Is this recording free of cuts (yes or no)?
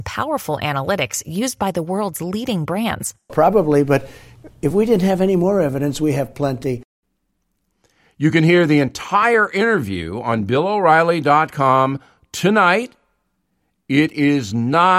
no